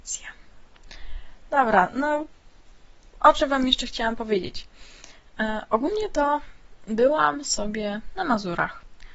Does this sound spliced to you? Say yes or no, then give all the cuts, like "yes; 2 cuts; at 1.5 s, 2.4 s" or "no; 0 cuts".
no; 0 cuts